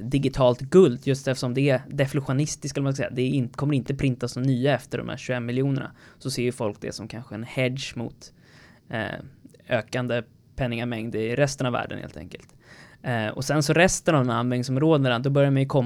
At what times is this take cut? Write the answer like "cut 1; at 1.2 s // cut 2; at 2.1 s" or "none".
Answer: none